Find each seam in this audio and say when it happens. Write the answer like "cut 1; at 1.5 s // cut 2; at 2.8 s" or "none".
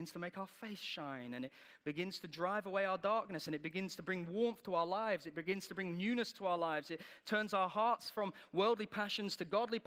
none